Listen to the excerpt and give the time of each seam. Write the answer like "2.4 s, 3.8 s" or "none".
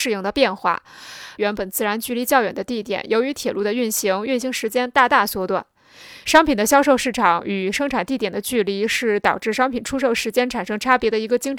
1.4 s, 6.2 s